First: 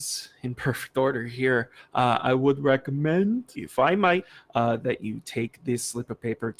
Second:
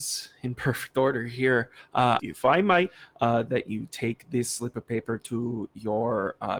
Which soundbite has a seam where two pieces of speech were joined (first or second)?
second